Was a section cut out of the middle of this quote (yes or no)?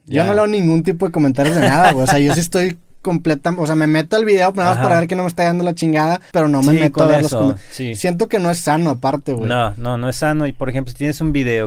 yes